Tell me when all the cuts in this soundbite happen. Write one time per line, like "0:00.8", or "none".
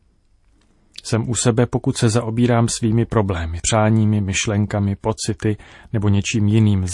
0:03.6